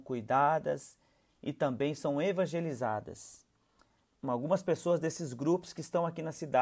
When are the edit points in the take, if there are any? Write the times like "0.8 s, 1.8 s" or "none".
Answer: 4.0 s